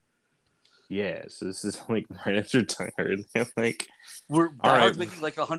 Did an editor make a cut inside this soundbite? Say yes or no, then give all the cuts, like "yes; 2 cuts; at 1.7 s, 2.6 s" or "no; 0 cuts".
no; 0 cuts